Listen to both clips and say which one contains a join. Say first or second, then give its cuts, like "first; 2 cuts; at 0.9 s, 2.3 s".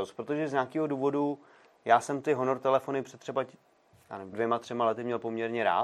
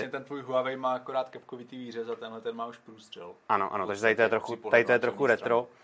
first; 1 cut; at 4.3 s